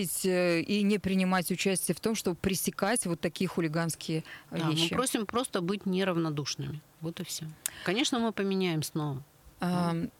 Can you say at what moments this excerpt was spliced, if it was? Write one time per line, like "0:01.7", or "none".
none